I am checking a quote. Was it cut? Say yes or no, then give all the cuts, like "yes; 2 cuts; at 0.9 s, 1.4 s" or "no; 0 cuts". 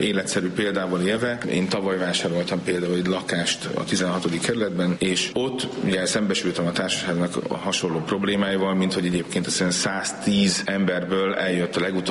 no; 0 cuts